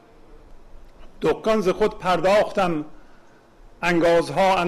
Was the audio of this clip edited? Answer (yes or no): yes